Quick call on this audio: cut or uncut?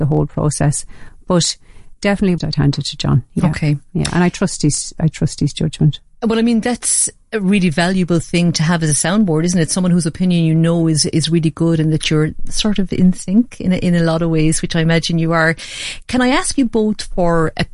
cut